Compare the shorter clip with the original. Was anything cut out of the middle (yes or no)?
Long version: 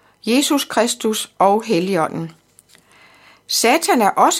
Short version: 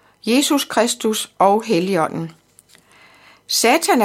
no